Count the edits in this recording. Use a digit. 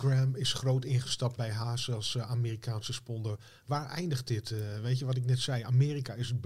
1